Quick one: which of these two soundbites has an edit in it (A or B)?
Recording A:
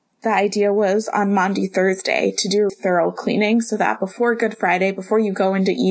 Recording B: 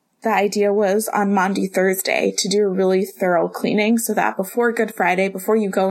A